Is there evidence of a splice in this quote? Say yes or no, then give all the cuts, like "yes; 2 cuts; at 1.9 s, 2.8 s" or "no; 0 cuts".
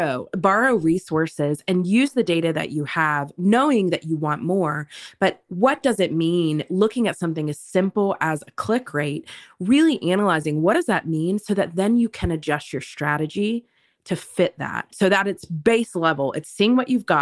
no; 0 cuts